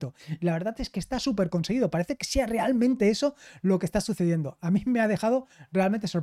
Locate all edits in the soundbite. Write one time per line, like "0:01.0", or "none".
none